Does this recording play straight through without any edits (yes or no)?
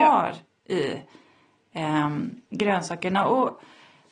yes